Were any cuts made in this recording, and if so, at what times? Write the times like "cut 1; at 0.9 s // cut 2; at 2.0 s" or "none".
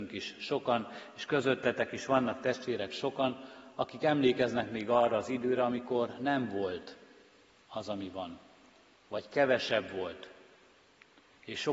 none